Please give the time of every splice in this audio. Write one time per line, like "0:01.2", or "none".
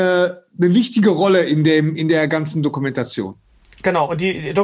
none